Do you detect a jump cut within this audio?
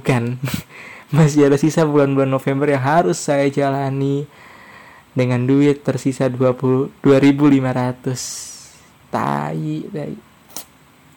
no; 0 cuts

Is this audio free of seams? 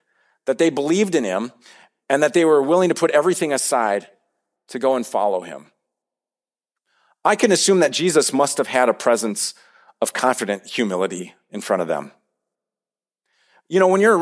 yes; 0 cuts

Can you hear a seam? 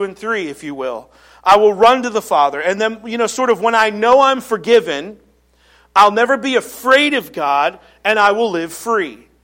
no; 0 cuts

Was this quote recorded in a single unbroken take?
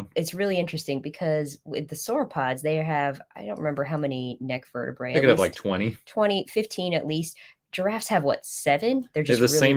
yes; 0 cuts

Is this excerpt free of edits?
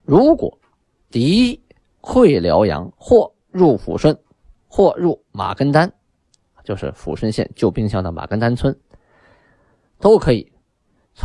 yes; 0 cuts

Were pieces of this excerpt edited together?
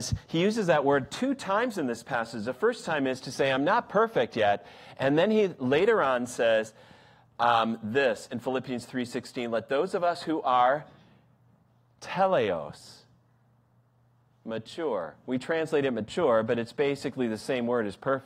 no; 0 cuts

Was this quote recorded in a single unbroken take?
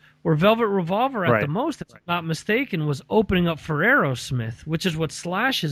yes; 0 cuts

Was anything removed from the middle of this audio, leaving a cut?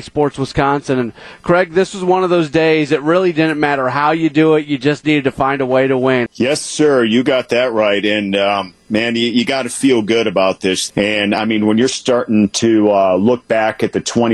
yes; 2 cuts; at 6.3 s, 10.9 s

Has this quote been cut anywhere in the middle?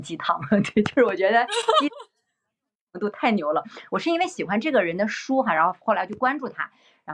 no; 0 cuts

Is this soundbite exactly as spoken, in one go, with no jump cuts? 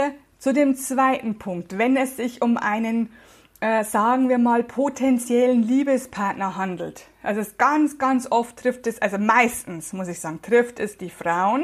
yes; 0 cuts

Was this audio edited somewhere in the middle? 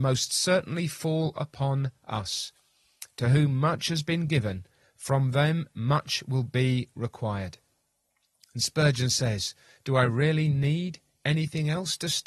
no; 0 cuts

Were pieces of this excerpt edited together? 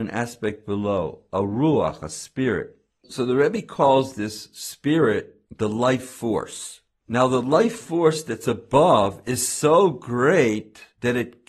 no; 0 cuts

